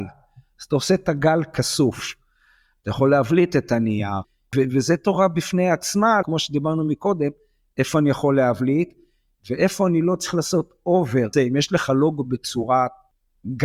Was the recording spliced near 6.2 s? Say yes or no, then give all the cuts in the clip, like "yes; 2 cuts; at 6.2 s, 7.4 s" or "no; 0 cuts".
yes; 2 cuts; at 6.2 s, 11.3 s